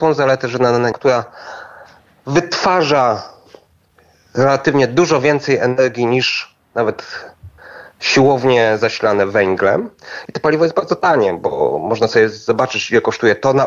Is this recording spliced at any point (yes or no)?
yes